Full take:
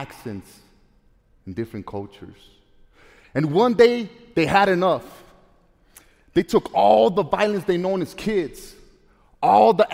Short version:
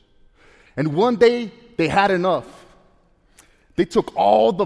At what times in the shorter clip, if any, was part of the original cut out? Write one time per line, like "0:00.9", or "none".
none